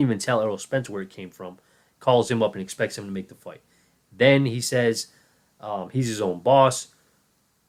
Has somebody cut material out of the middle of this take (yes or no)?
no